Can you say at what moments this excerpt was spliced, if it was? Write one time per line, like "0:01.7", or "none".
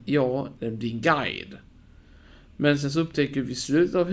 none